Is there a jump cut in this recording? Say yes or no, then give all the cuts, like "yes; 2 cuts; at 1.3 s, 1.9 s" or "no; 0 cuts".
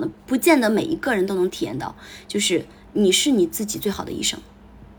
yes; 1 cut; at 1.5 s